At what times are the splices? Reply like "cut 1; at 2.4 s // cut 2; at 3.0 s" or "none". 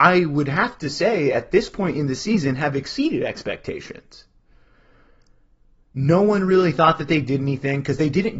none